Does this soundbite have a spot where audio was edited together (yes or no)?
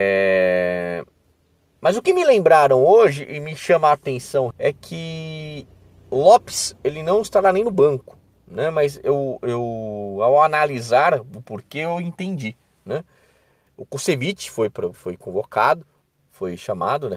yes